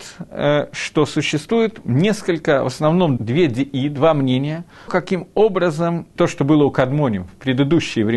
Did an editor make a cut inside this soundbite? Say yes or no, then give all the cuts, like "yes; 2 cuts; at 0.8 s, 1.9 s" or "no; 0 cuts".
yes; 3 cuts; at 3.2 s, 4.9 s, 6.2 s